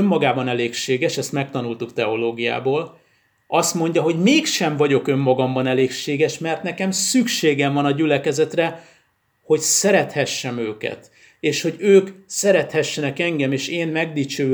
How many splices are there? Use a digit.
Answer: 0